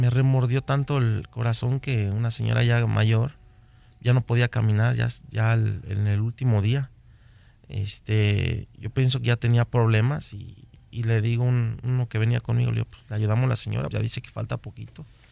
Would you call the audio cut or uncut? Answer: cut